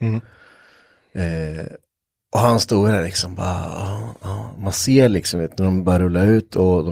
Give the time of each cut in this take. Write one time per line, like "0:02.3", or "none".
none